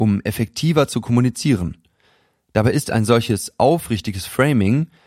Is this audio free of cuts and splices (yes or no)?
yes